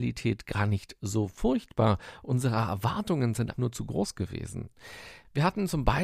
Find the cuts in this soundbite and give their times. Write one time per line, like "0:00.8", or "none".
0:03.5